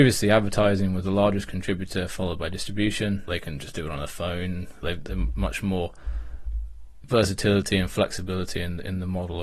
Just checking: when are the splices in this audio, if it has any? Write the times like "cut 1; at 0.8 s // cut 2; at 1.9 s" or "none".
cut 1; at 3.3 s // cut 2; at 4.8 s